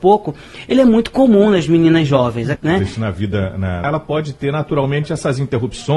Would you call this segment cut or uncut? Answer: cut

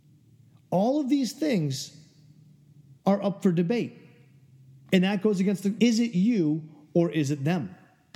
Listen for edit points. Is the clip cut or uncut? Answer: cut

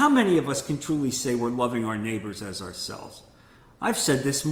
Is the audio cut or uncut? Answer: uncut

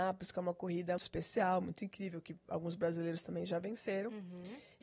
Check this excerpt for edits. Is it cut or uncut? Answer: cut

